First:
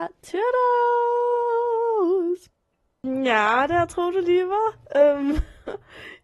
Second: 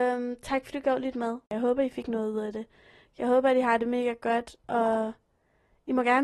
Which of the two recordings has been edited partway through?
second; 1 cut; at 1.5 s

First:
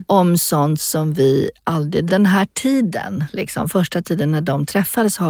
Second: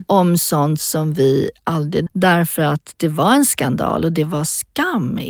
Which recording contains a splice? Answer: second; 1 cut; at 2.1 s

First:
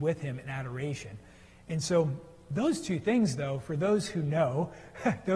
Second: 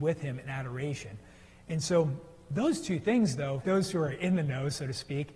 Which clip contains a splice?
second; 1 cut; at 3.6 s

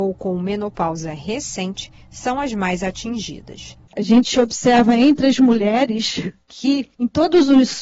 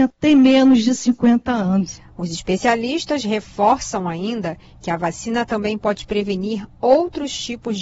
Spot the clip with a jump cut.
first; 1 cut; at 3.9 s

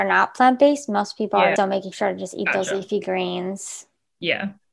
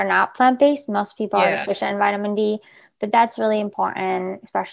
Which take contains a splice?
first; 1 cut; at 1.6 s

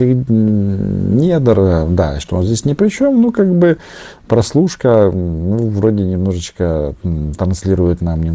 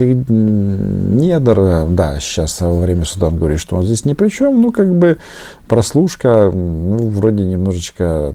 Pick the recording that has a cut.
first; 1 cut; at 2.2 s

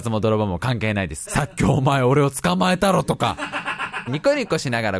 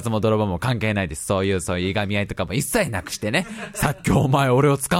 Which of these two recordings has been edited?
first; 2 cuts; at 1.2 s, 4.1 s

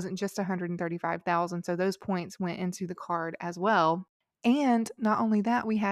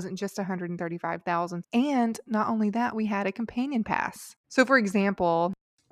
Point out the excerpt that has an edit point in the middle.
second; 2 cuts; at 1.6 s, 4.4 s

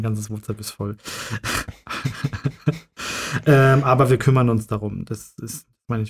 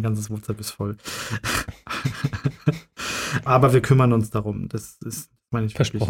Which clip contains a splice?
second; 1 cut; at 3.5 s

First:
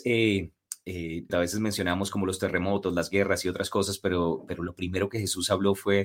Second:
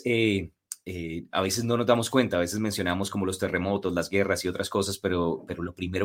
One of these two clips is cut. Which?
first; 1 cut; at 1.3 s

